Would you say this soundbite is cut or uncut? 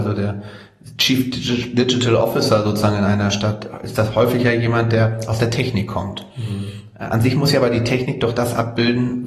uncut